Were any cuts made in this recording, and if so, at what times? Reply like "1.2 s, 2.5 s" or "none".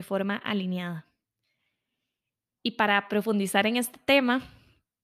none